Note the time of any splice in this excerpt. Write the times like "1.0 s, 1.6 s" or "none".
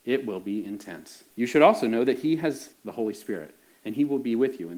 1.3 s, 2.7 s